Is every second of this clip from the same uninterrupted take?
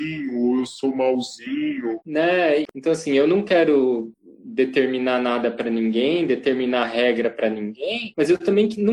yes; 0 cuts

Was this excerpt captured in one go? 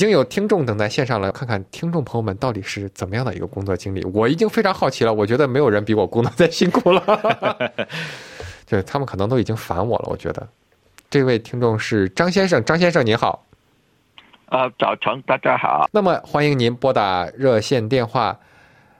no; 2 cuts; at 1.3 s, 15.9 s

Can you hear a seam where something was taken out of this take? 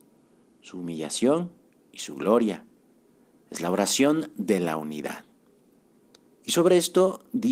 yes; 1 cut; at 6.3 s

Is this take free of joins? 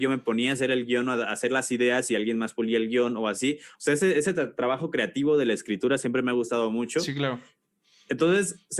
yes; 0 cuts

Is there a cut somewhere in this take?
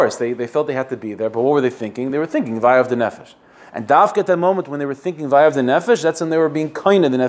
no; 0 cuts

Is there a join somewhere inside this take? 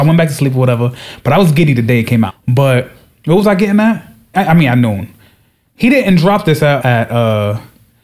yes; 3 cuts; at 2.3 s, 4.3 s, 6.8 s

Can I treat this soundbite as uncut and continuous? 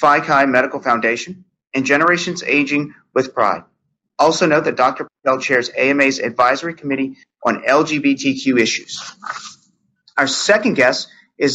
yes; 0 cuts

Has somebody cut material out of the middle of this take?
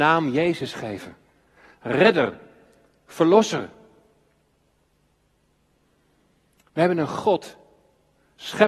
no; 0 cuts

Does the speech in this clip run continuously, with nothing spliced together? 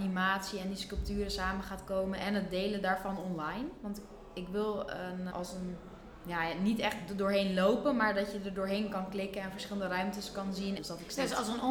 no; 2 cuts; at 5.3 s, 10.8 s

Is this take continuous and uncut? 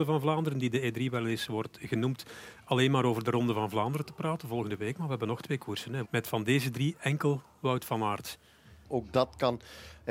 no; 2 cuts; at 6.0 s, 8.8 s

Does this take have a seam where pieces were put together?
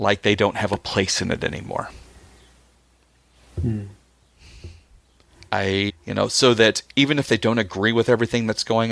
yes; 1 cut; at 5.9 s

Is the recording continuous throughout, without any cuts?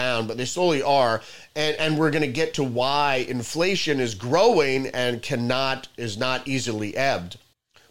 yes; 0 cuts

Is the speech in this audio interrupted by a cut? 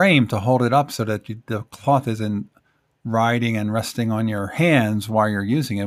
no; 0 cuts

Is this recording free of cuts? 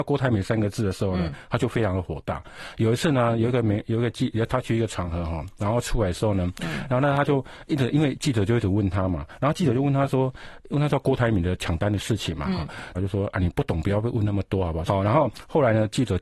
no; 2 cuts; at 12.9 s, 14.9 s

